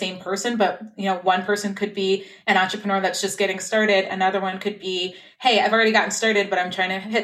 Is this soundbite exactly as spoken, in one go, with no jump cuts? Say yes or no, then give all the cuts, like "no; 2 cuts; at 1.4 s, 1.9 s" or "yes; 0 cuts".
yes; 0 cuts